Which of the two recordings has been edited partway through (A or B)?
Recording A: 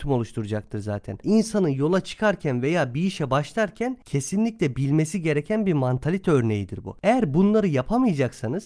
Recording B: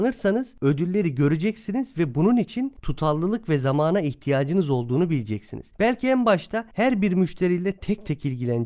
A